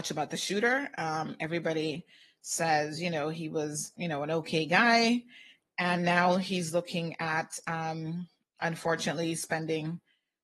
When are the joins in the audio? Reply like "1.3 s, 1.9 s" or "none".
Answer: 3.9 s